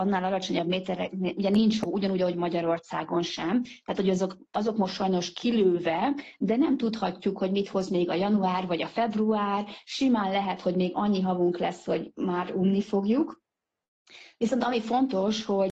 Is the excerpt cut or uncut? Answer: uncut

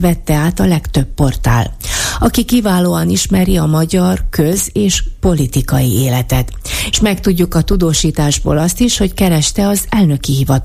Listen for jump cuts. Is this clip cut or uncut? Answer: cut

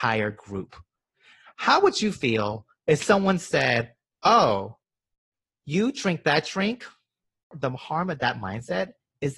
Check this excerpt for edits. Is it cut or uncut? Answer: cut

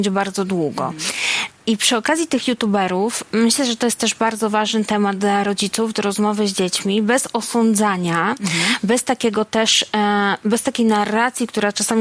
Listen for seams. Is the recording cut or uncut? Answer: cut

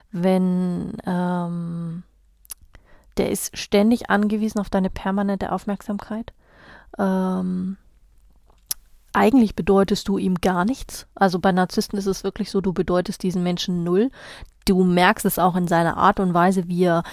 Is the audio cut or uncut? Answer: uncut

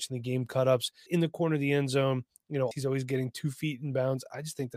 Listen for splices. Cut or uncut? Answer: cut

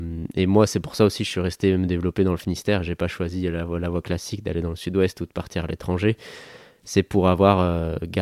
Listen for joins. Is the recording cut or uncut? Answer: uncut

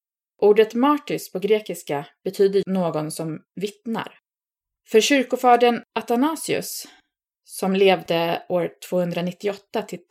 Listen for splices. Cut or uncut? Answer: cut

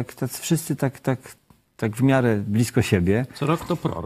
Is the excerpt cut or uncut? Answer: uncut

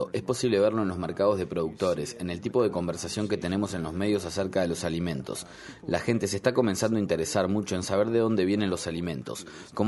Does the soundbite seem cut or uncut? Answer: uncut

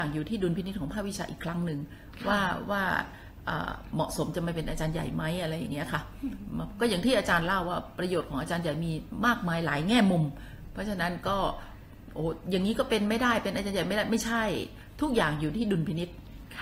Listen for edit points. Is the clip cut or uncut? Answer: uncut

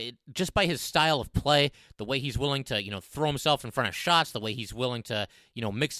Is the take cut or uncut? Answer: uncut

